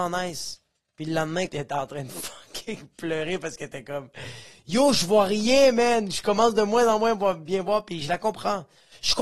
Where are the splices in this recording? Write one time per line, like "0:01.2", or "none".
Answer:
0:01.5